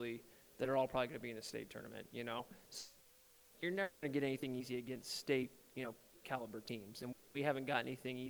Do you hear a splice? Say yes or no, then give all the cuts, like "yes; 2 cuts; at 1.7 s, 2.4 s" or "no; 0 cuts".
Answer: no; 0 cuts